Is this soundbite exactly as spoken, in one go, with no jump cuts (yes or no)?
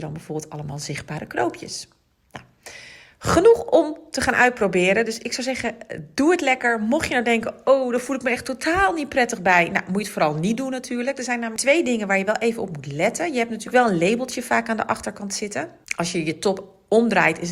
yes